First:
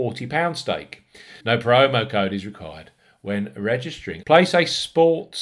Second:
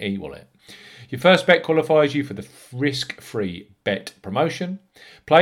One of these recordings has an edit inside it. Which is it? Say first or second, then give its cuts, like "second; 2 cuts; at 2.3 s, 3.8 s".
first; 2 cuts; at 1.4 s, 4.2 s